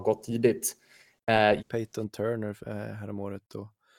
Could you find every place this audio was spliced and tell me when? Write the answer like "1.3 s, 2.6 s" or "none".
1.6 s